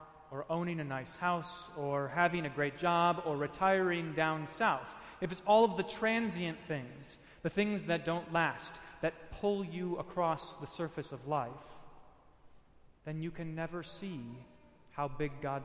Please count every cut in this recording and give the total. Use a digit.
0